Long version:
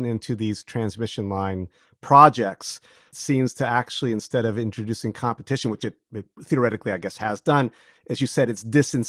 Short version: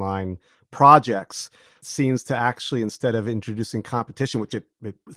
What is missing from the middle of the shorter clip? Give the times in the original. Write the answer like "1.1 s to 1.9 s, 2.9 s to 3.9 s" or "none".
none